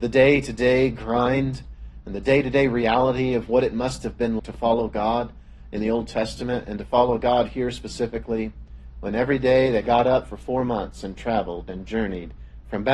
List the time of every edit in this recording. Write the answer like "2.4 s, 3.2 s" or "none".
4.4 s